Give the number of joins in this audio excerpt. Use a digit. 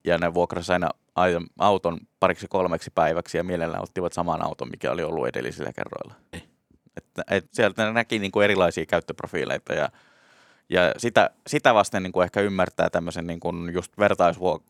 2